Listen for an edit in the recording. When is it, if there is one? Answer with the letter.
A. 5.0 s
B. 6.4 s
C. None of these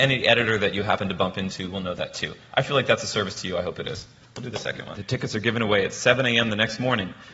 A